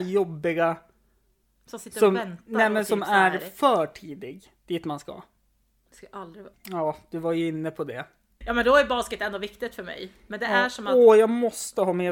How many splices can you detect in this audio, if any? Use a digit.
2